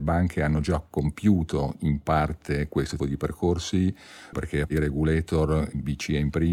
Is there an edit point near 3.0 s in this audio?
yes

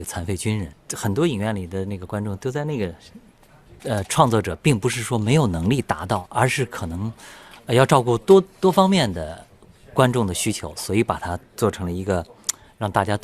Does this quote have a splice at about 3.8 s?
yes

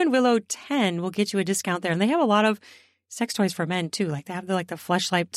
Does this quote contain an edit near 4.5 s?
no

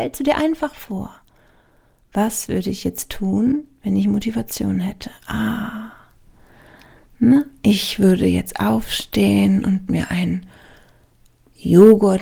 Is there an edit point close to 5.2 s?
no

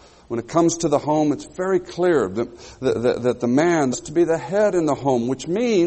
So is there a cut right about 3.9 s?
yes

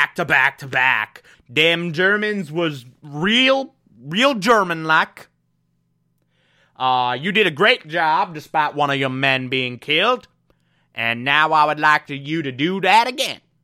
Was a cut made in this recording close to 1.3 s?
yes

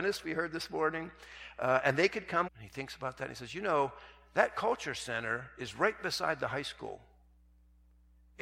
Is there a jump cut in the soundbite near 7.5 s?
no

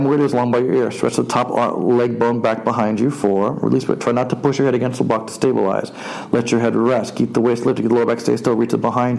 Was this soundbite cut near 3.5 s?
no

